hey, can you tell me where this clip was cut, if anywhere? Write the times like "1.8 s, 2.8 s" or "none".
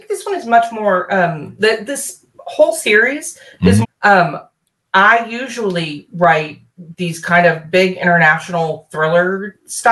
3.8 s